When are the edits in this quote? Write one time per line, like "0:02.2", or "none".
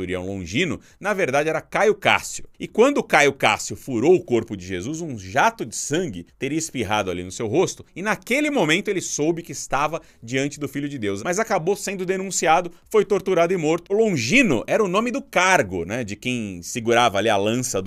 0:11.2
0:13.9